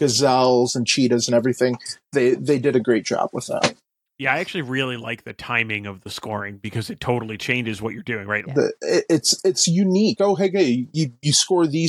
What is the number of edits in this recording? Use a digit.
2